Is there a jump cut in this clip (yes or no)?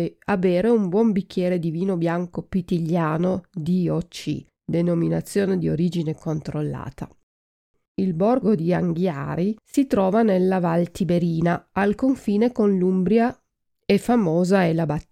no